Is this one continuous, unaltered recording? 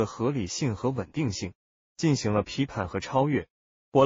no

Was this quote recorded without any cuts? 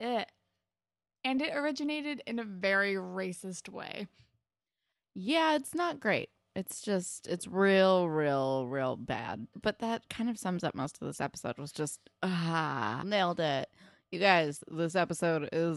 no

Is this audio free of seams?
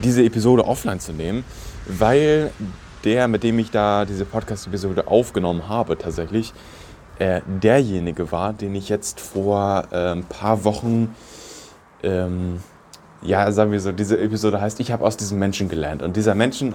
yes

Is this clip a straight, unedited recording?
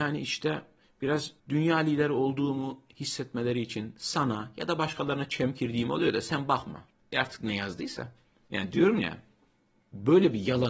no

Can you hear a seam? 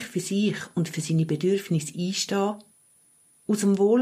no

